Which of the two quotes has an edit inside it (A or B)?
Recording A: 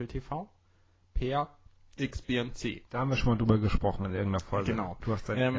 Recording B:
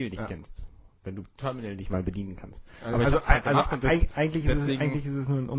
A